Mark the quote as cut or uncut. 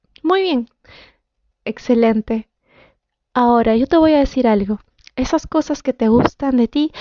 uncut